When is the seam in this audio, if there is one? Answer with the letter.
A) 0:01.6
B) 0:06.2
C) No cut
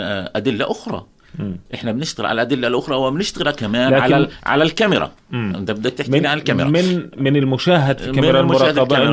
C